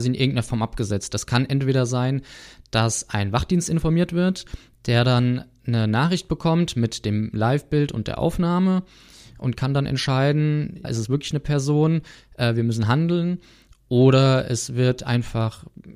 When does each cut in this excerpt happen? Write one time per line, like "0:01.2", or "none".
0:10.8

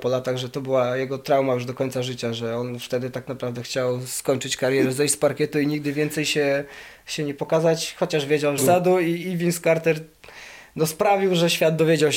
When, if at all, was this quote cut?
0:08.6

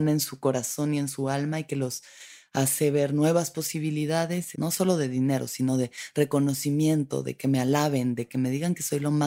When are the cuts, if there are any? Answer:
0:04.5

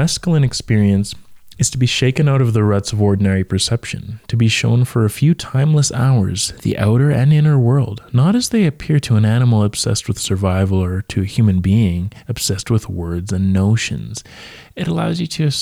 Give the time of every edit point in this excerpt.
none

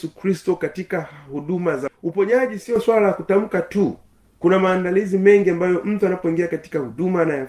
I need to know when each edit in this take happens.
0:01.9

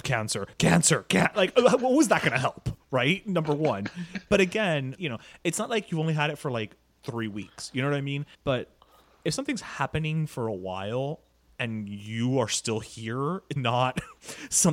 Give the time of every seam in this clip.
0:05.0
0:08.3
0:13.6

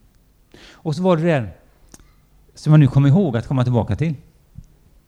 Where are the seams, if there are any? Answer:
none

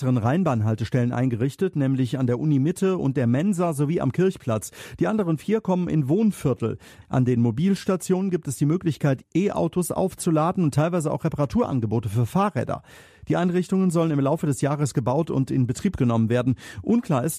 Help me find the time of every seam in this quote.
0:09.2

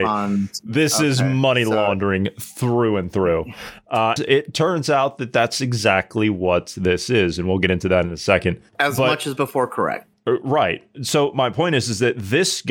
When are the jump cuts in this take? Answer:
0:04.2
0:08.7

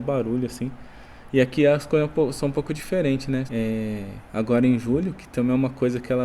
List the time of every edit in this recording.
0:03.5

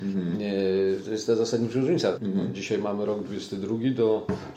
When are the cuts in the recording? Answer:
0:02.1

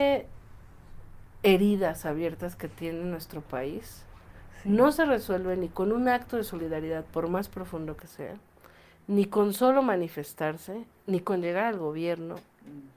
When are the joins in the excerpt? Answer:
none

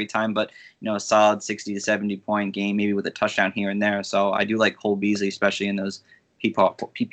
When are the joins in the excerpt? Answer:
none

